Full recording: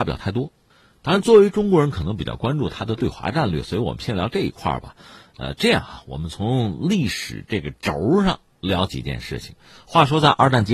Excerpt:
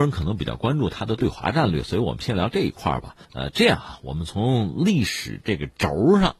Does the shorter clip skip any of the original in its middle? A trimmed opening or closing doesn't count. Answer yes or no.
yes